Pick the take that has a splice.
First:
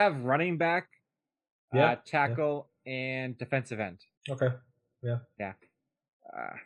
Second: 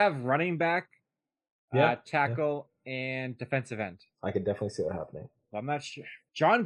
second; 2 cuts; at 4.1 s, 5.5 s

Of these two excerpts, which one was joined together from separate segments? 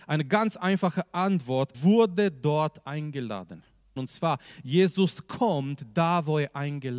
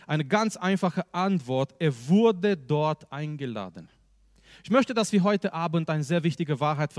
first; 2 cuts; at 1.7 s, 4.0 s

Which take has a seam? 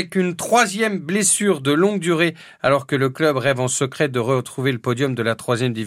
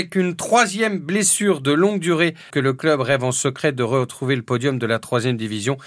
second; 1 cut; at 2.5 s

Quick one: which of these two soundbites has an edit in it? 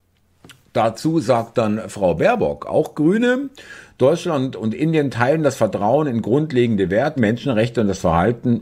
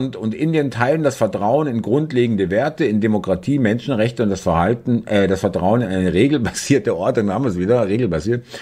first; 1 cut; at 7.2 s

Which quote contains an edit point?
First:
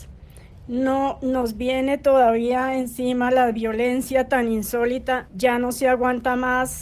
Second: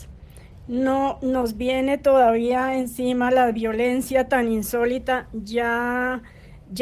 first; 1 cut; at 5.3 s

